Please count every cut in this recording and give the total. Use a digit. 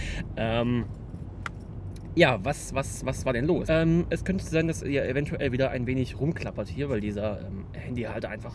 1